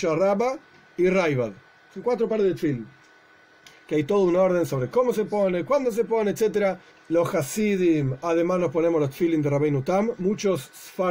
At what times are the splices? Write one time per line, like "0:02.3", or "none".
0:06.9